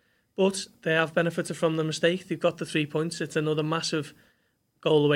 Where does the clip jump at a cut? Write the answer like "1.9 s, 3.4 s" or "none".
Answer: none